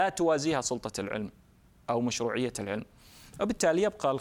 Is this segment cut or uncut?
uncut